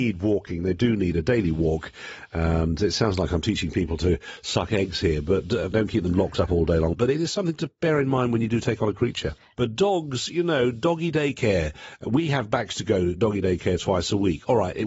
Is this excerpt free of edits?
no; 3 cuts; at 5.7 s, 6.9 s, 9.5 s

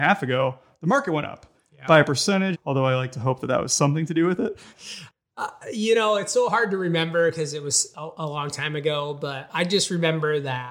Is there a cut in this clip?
yes; 2 cuts; at 2.5 s, 4.7 s

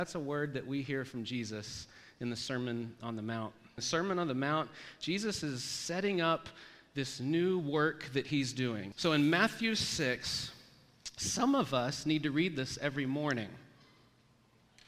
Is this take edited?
yes; 2 cuts; at 3.8 s, 8.9 s

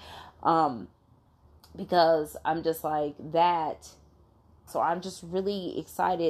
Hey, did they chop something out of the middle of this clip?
yes; 1 cut; at 4.7 s

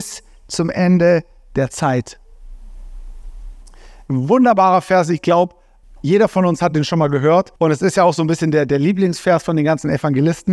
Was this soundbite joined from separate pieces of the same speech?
yes; 2 cuts; at 5.8 s, 7.6 s

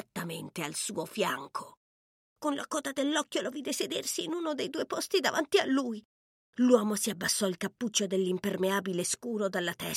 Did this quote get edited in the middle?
yes; 1 cut; at 2.2 s

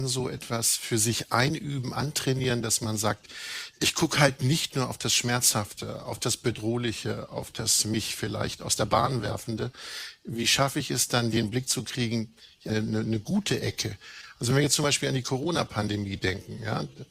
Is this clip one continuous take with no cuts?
no; 1 cut; at 12.7 s

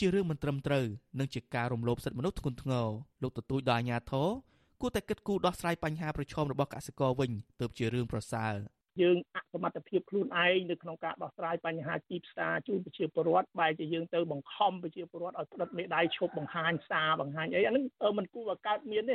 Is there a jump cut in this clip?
yes; 1 cut; at 3.1 s

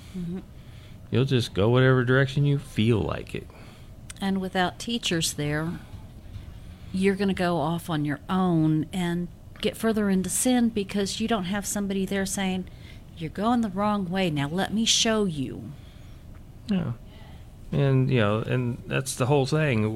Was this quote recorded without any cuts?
yes; 0 cuts

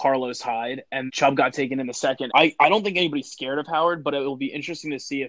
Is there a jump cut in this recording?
yes; 2 cuts; at 1.1 s, 2.3 s

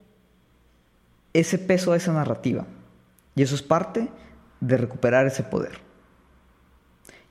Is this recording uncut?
yes; 0 cuts

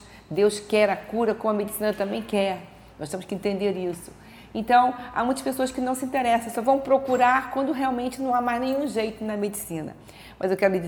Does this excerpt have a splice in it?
no; 0 cuts

